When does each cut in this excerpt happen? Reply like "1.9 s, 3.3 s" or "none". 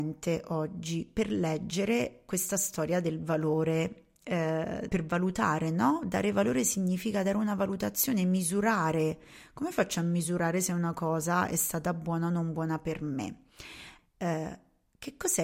4.9 s, 14.0 s